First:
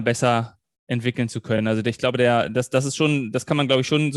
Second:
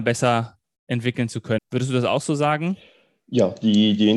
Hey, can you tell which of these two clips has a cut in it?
second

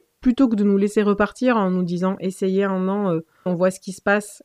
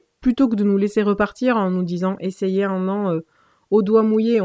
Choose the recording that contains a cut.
first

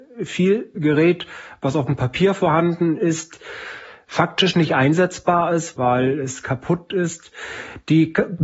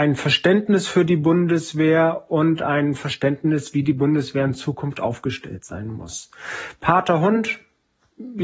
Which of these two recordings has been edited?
first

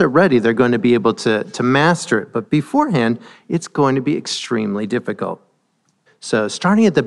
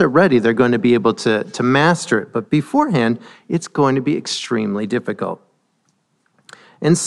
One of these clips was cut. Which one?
first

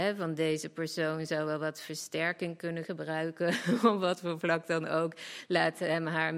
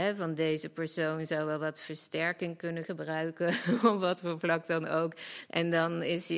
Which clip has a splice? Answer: second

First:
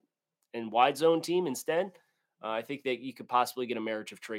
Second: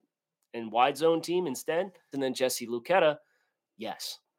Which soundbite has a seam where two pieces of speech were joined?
second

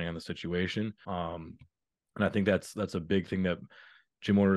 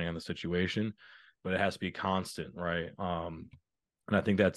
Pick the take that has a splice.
first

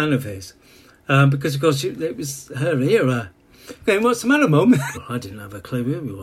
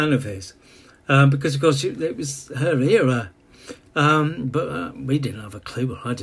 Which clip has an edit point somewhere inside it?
first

